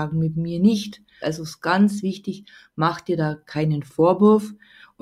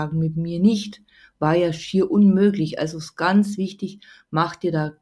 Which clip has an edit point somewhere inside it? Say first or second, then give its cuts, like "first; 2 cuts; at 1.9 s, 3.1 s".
first; 1 cut; at 1.2 s